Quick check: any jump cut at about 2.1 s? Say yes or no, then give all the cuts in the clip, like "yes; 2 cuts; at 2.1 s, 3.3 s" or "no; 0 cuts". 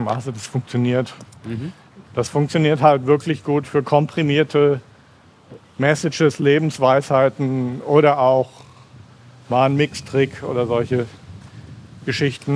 yes; 1 cut; at 2.1 s